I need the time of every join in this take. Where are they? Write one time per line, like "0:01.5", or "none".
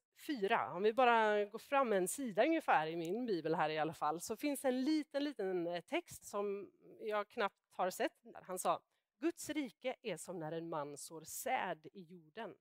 0:06.2
0:08.3